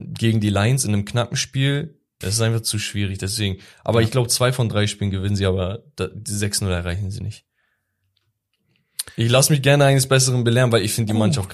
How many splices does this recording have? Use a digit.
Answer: 1